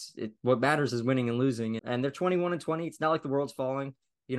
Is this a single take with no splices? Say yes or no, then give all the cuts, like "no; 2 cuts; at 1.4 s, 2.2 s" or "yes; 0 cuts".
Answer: no; 1 cut; at 1.8 s